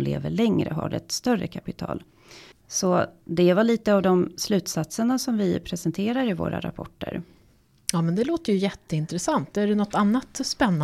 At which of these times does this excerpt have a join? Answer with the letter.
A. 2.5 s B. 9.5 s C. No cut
A